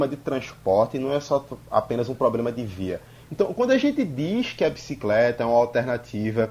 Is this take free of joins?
no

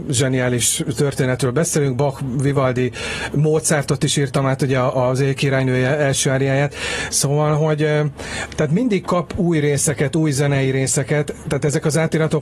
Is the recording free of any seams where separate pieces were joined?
yes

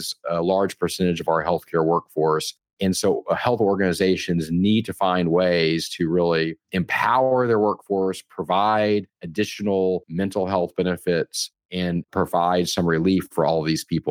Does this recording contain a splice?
no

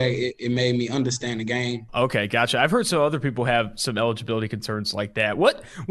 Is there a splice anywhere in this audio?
yes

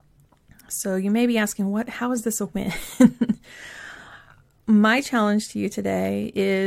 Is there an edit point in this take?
no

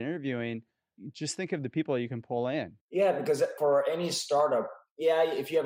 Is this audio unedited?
yes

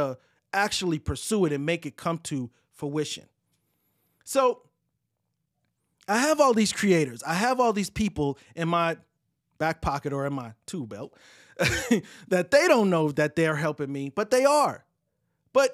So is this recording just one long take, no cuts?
yes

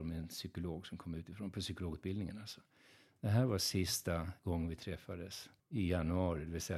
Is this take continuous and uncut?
no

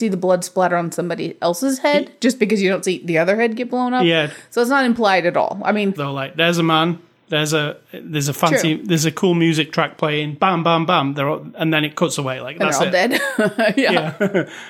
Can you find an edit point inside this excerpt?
yes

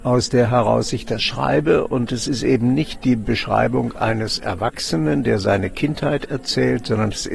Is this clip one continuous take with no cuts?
yes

